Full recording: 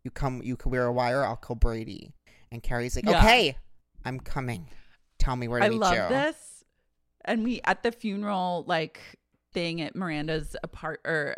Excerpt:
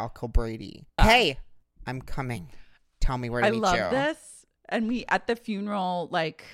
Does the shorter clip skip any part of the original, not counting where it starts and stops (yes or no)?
yes